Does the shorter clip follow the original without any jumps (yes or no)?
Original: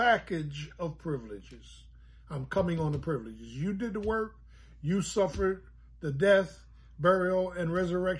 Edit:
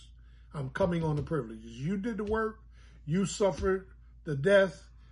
yes